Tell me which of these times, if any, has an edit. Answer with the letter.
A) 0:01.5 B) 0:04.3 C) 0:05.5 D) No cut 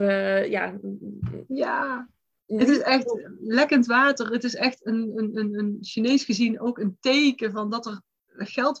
D